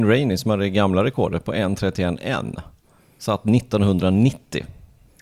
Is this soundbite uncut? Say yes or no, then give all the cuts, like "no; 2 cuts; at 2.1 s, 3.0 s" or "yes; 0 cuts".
yes; 0 cuts